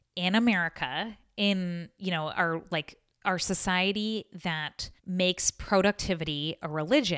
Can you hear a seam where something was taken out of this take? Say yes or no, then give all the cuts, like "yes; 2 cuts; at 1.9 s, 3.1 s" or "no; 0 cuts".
yes; 1 cut; at 5.0 s